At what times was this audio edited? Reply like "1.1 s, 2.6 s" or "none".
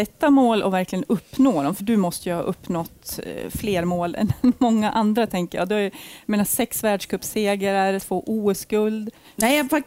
1.8 s, 8.0 s